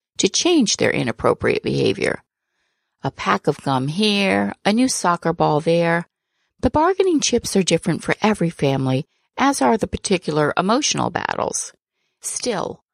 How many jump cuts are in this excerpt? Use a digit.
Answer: 0